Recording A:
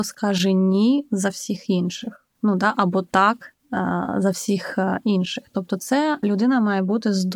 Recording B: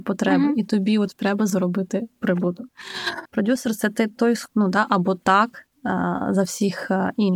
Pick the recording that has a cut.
B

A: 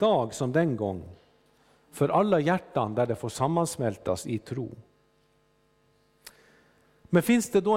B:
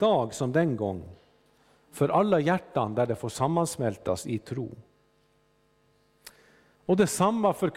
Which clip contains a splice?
B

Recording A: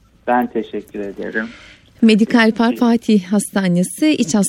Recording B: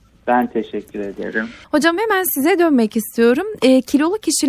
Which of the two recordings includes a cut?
B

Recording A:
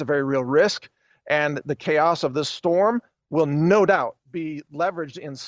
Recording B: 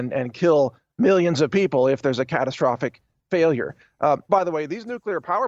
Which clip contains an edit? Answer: B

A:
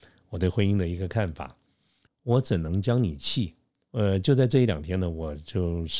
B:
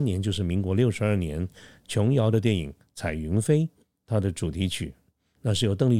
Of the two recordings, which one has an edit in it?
A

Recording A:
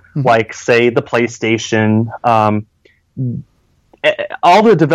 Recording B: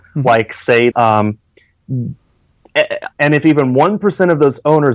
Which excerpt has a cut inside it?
B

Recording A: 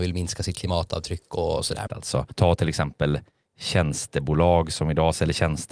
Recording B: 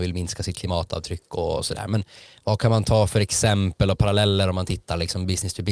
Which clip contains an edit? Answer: A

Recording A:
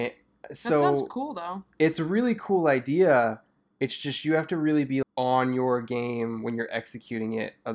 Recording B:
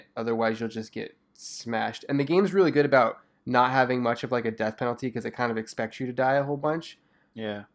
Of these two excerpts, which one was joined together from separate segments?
A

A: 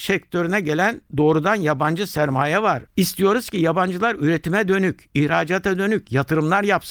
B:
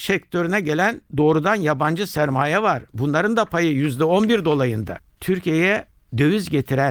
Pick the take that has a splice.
A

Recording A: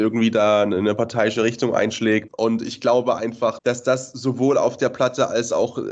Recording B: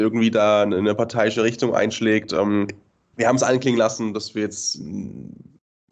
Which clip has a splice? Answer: A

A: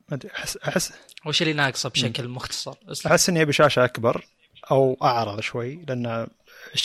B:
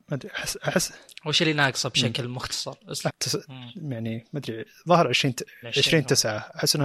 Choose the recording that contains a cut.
B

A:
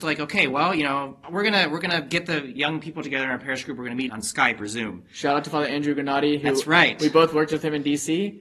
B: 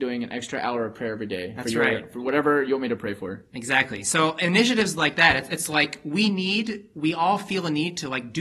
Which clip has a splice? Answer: A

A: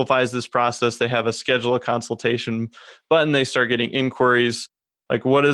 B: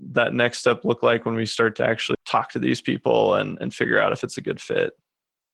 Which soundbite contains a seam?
B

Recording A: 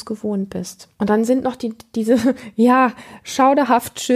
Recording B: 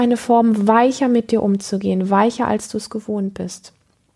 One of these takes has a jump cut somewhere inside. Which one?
A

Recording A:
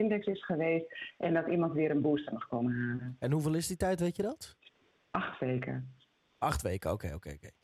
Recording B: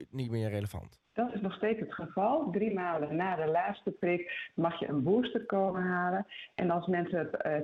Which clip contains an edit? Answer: B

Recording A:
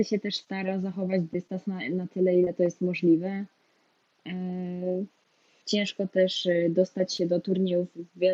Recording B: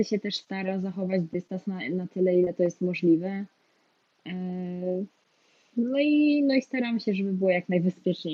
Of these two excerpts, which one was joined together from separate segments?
A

